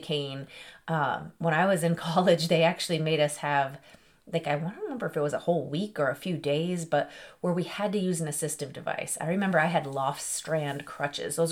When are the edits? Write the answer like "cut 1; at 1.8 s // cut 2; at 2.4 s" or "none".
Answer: none